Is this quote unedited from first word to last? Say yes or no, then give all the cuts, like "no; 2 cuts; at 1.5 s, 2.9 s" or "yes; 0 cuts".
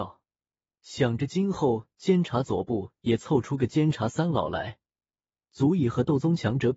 yes; 0 cuts